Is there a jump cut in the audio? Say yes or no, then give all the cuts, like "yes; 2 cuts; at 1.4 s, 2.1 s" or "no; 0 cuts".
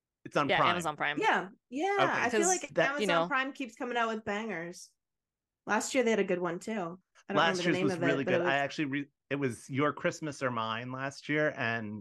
yes; 1 cut; at 1.6 s